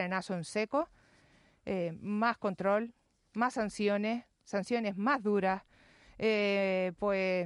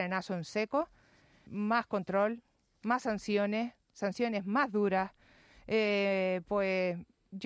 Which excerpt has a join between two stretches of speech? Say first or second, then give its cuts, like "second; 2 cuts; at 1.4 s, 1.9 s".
second; 1 cut; at 1.5 s